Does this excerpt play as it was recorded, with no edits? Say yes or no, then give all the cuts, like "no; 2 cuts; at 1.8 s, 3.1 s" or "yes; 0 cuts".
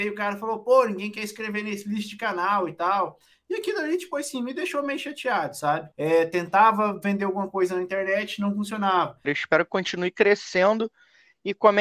no; 2 cuts; at 5.9 s, 9.2 s